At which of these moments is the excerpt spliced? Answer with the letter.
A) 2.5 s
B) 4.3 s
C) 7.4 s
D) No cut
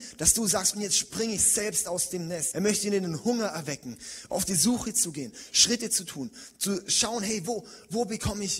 A